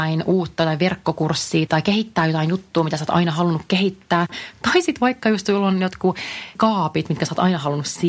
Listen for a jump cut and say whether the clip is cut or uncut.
uncut